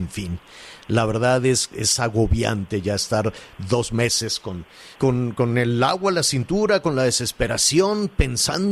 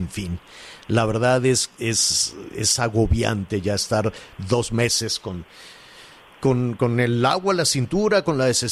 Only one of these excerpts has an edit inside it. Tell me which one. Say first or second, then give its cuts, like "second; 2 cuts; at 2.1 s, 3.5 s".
first; 2 cuts; at 1.7 s, 4.9 s